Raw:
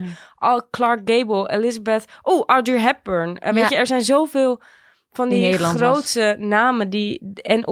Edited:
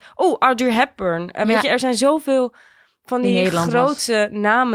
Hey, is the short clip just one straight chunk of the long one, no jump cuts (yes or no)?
yes